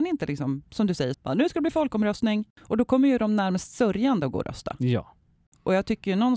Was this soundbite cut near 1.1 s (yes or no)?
yes